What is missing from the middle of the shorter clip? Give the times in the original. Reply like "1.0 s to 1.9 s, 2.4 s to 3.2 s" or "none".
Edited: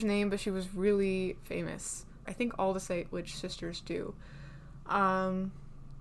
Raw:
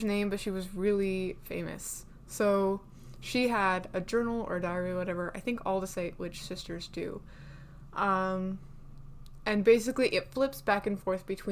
2.3 s to 5.3 s